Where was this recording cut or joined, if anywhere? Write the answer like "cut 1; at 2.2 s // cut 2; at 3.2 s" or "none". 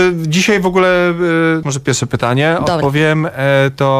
cut 1; at 1.6 s